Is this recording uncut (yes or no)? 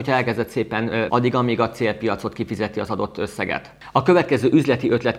no